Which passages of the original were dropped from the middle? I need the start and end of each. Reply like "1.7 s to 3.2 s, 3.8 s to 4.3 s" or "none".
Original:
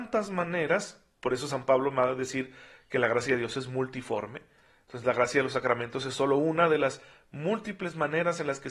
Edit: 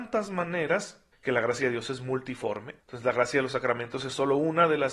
1.1 s to 2.8 s, 4.5 s to 4.8 s